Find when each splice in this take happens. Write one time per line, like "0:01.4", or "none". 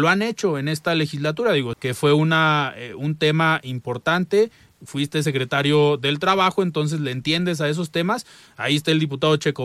0:01.7